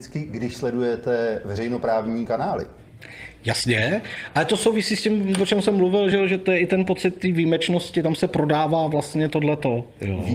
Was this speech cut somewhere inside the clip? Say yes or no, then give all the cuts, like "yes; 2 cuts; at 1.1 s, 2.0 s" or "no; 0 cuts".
no; 0 cuts